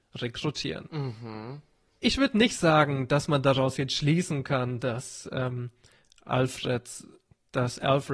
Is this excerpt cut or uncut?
cut